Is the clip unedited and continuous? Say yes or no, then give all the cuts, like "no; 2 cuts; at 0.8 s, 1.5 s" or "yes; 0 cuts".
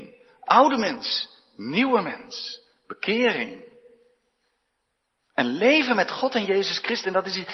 yes; 0 cuts